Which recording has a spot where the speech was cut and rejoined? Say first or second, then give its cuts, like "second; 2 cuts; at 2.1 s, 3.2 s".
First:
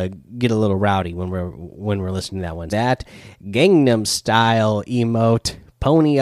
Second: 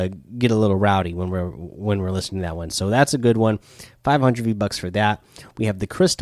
first; 1 cut; at 2.7 s